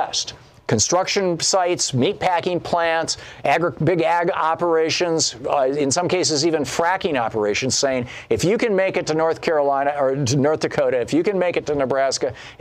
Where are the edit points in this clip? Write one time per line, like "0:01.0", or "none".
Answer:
none